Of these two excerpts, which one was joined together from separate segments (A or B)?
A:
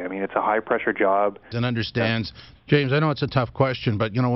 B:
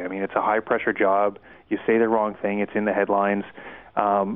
A